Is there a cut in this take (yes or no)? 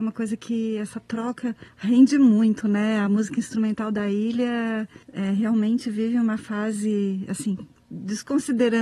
yes